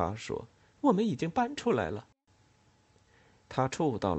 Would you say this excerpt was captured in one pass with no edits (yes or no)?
yes